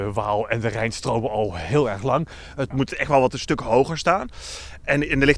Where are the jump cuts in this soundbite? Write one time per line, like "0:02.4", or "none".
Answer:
0:02.7